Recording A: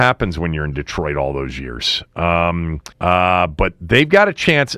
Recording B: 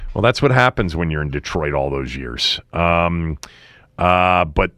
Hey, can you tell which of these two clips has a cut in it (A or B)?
A